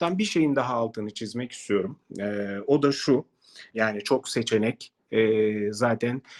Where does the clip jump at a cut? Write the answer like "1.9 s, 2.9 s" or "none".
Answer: 3.7 s